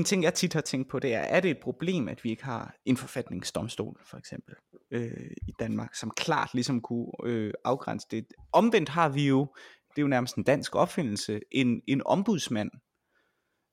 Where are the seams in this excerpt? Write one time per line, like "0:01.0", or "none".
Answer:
none